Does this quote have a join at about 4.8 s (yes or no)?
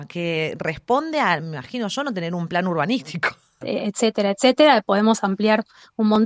no